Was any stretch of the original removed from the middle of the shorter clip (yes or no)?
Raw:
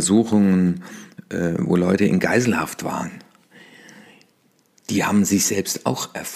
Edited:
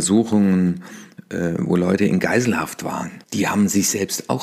yes